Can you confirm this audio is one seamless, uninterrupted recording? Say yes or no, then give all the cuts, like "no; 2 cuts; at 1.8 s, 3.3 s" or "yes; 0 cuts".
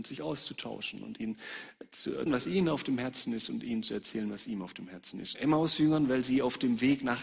no; 2 cuts; at 2.3 s, 5.3 s